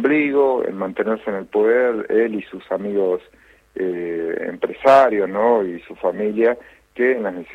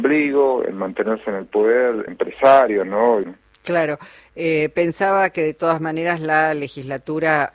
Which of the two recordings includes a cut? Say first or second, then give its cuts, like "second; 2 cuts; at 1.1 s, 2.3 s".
second; 2 cuts; at 2.1 s, 3.2 s